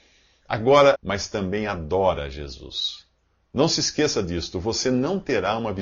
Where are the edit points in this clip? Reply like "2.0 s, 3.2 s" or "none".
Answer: 0.9 s